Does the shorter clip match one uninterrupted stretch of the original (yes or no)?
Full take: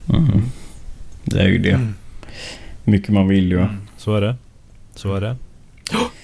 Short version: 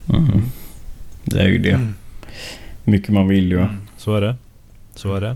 yes